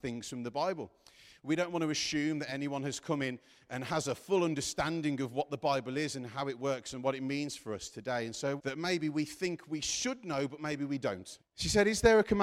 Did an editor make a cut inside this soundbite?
yes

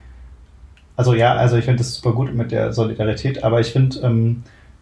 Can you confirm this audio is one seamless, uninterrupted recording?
yes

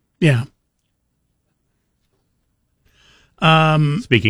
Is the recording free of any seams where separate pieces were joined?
yes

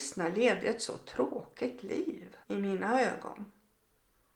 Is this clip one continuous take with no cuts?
no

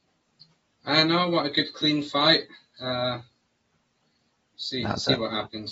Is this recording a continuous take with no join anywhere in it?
no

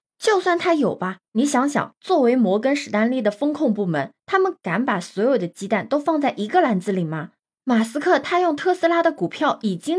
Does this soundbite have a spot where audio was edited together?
no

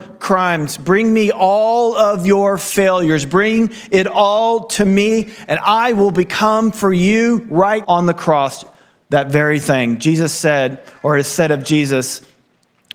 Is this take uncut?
no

